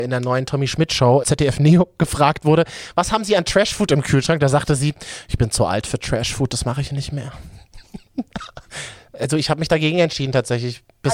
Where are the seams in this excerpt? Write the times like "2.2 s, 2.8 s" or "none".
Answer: 1.2 s